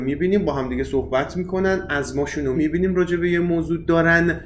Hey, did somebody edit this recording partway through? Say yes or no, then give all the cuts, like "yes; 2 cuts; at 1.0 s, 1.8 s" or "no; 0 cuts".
yes; 1 cut; at 2.5 s